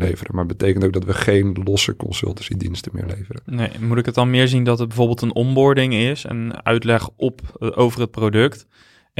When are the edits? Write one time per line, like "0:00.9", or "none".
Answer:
0:06.5